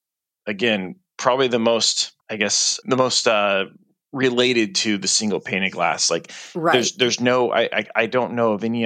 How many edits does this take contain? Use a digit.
1